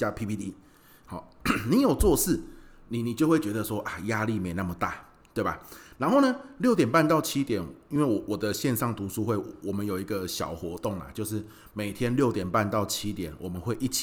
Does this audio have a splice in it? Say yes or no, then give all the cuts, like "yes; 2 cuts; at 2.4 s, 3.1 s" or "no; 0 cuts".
no; 0 cuts